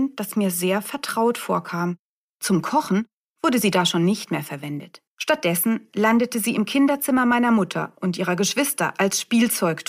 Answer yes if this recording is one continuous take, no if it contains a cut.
no